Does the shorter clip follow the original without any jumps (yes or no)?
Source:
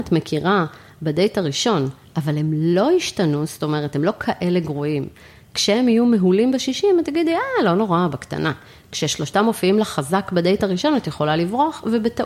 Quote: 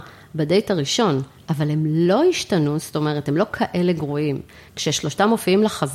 no